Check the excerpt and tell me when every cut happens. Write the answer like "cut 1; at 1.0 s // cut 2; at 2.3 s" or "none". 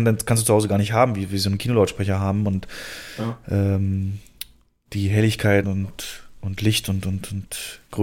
cut 1; at 5.6 s